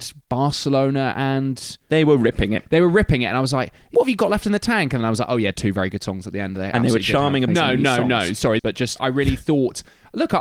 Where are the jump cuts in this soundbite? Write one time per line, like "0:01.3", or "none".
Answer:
0:07.5
0:08.6